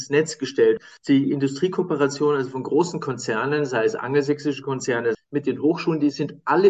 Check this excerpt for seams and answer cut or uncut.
cut